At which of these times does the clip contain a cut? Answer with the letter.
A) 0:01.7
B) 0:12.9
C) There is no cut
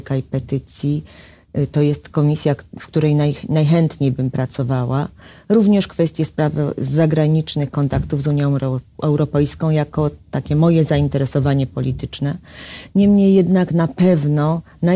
C